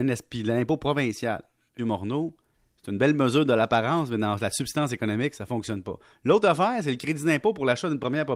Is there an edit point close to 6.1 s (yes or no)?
no